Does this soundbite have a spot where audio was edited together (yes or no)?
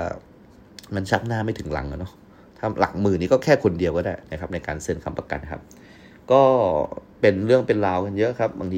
yes